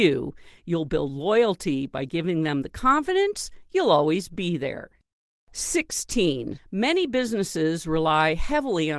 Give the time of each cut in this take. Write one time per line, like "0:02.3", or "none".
0:06.6